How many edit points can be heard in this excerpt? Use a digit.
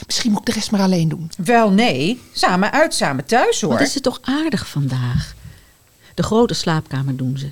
0